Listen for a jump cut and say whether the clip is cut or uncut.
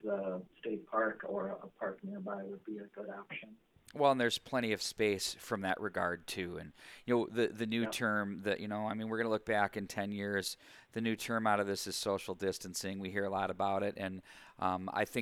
uncut